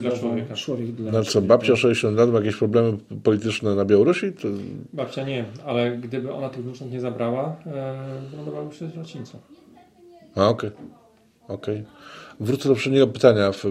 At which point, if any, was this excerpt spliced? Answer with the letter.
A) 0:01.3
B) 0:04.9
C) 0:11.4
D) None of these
D